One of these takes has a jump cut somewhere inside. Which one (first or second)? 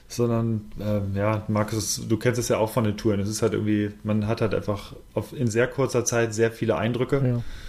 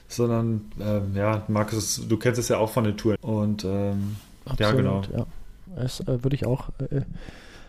second